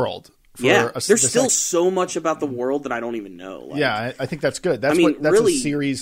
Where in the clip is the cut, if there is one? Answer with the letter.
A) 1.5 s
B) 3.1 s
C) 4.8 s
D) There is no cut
D